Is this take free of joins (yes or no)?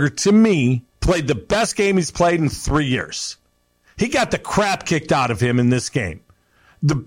no